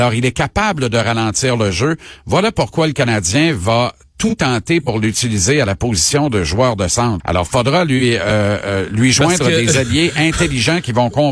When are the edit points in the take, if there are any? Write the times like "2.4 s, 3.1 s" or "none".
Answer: 7.2 s